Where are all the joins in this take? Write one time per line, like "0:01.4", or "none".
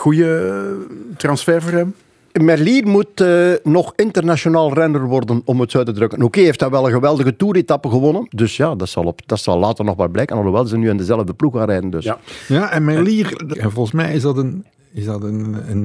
0:08.3
0:13.5